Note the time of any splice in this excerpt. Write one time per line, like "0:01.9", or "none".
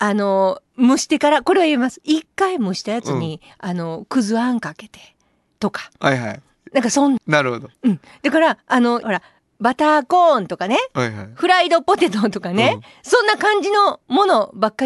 0:07.2
0:09.0

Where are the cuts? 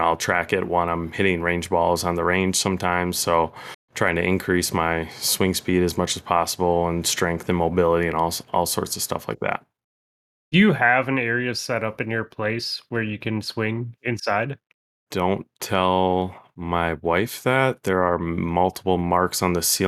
0:15.1

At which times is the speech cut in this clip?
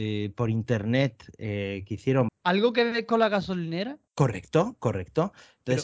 0:02.3
0:04.1

